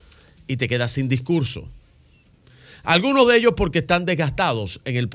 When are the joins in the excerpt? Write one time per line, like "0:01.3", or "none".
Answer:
none